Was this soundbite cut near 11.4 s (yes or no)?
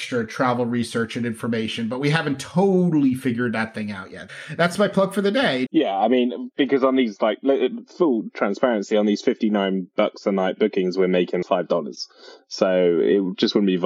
yes